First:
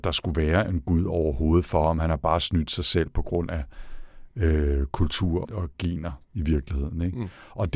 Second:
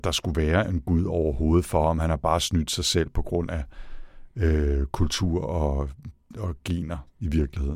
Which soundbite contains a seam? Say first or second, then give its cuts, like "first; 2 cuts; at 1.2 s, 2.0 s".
first; 1 cut; at 5.4 s